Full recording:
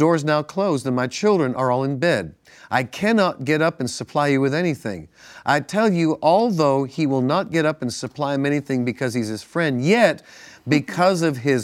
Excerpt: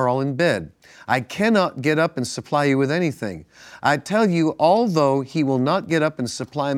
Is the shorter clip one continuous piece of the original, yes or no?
yes